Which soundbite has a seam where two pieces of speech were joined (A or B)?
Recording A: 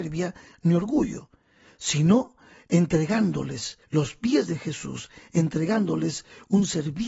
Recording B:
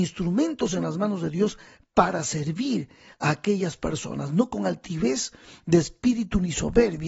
A